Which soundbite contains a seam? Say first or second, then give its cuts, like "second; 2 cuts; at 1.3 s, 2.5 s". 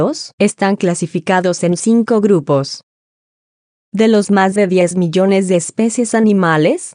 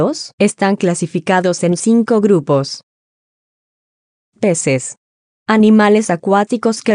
first; 1 cut; at 3.8 s